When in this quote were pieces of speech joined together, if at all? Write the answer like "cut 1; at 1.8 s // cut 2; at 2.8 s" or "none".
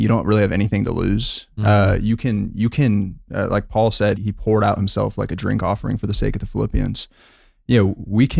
cut 1; at 4.2 s